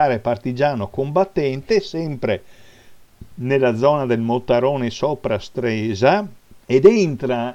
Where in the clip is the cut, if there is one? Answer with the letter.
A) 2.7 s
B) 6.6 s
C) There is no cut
B